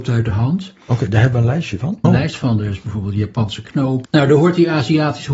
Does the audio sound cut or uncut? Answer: cut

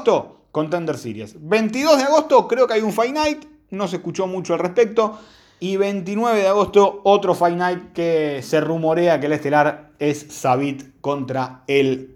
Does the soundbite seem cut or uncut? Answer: cut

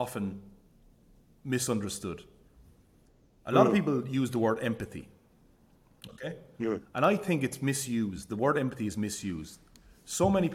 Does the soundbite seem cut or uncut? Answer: uncut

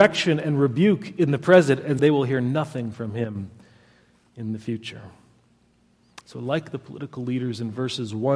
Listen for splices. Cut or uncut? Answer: cut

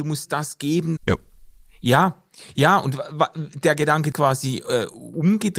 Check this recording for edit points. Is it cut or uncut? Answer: cut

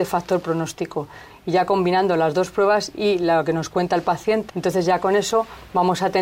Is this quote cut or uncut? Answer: cut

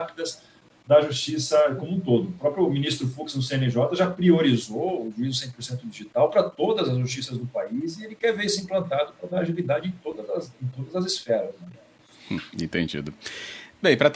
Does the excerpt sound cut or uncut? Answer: uncut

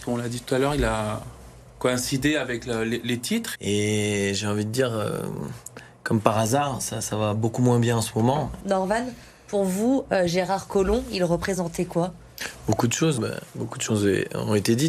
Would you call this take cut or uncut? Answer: cut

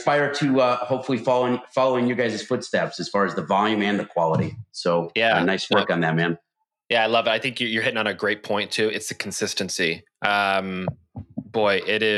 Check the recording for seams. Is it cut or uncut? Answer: uncut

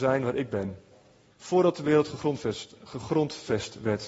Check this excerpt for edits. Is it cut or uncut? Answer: cut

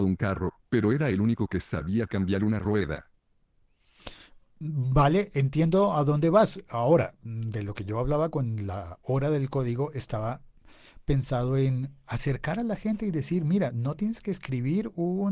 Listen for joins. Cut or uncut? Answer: uncut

